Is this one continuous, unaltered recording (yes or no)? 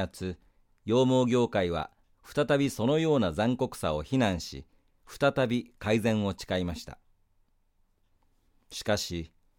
yes